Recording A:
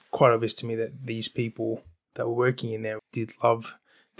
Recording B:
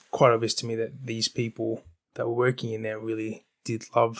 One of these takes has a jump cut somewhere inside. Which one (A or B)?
A